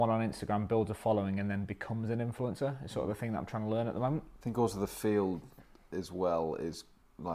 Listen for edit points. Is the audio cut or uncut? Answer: uncut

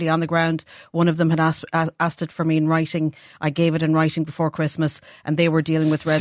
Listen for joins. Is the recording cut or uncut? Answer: uncut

